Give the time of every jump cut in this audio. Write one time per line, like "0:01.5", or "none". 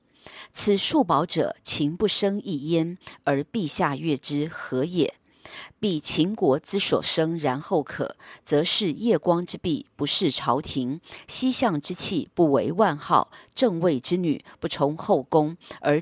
none